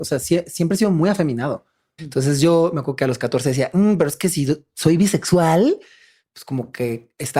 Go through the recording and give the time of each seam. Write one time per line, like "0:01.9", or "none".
0:02.0